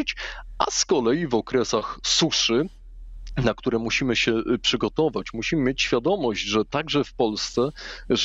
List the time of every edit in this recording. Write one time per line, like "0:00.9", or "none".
none